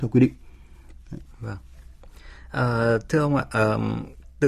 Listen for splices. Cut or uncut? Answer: uncut